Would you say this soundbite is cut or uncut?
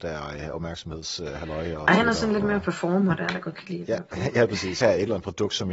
cut